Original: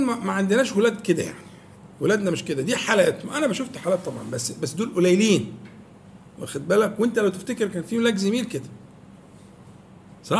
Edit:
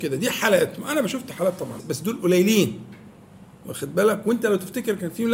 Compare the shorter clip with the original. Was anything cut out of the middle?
yes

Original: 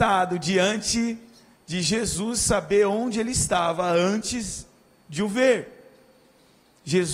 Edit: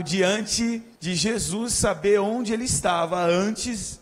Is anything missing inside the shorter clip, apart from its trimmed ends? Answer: yes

